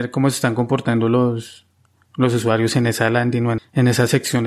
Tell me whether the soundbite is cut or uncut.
cut